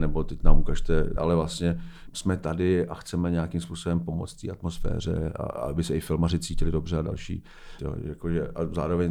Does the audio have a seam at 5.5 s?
no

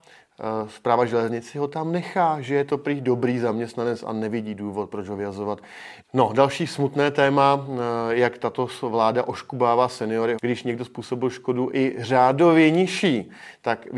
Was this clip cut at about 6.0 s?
yes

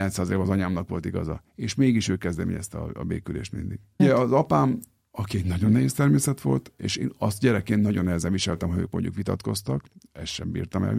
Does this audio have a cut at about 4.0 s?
yes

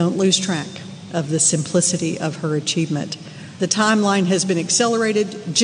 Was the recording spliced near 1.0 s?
no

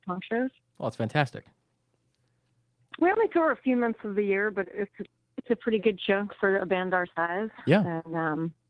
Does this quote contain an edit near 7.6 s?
no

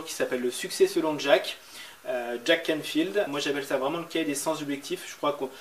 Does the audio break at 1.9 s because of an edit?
no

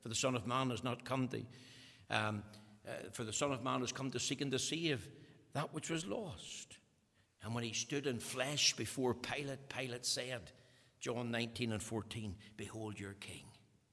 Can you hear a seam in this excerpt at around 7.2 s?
yes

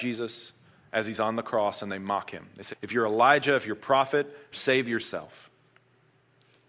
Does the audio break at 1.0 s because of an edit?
no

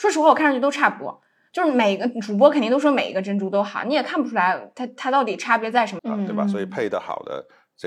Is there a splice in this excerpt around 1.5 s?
no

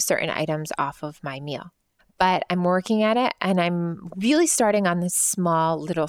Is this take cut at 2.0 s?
yes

